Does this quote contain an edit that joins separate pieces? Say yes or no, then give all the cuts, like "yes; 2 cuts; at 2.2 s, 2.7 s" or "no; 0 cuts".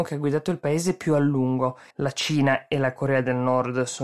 yes; 1 cut; at 1.9 s